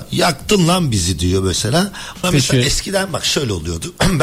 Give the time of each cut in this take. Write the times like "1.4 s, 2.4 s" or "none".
2.2 s